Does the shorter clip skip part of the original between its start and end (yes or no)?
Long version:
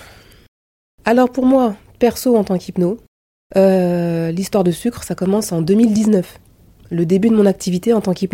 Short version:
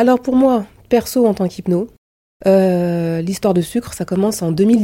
no